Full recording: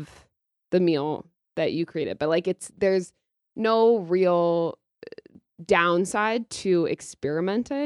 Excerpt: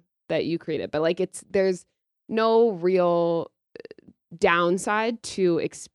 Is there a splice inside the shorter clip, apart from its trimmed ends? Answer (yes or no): no